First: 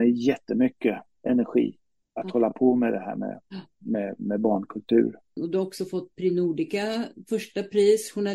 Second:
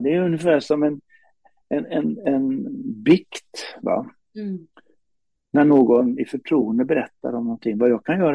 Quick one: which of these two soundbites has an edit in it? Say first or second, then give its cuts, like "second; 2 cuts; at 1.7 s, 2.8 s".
first; 1 cut; at 5.4 s